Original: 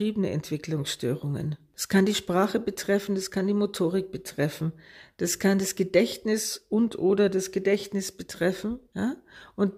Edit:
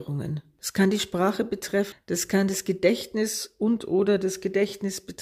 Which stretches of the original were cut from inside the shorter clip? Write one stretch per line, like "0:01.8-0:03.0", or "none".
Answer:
0:03.1-0:05.0